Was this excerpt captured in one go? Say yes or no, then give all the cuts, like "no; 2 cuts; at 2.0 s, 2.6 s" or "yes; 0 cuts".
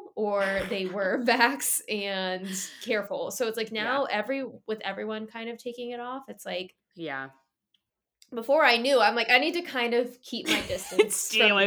yes; 0 cuts